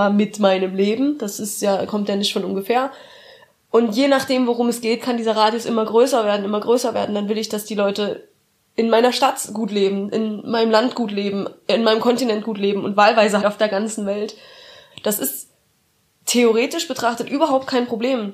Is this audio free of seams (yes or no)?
no